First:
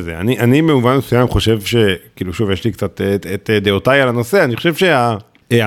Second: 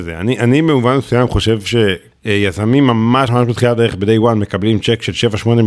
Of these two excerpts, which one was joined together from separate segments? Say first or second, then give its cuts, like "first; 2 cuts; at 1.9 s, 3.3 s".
second; 2 cuts; at 2.1 s, 3.3 s